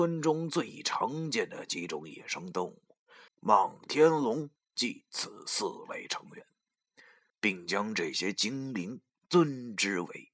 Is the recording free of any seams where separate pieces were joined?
no; 3 cuts; at 3.3 s, 4.6 s, 7.3 s

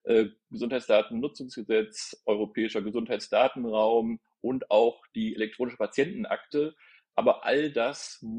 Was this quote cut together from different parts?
no; 0 cuts

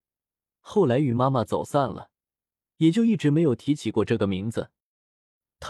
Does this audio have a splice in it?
no; 0 cuts

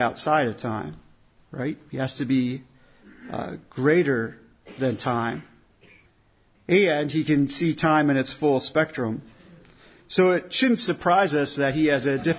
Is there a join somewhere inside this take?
no; 0 cuts

